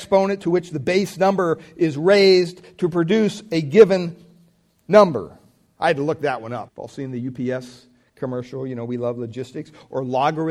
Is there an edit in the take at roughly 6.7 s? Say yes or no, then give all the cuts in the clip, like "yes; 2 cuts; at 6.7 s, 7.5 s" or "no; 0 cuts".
yes; 1 cut; at 6.7 s